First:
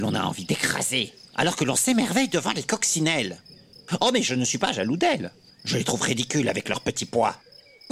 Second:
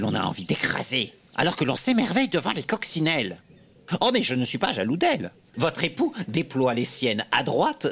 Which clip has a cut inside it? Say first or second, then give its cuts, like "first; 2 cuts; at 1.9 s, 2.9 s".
second; 1 cut; at 5.5 s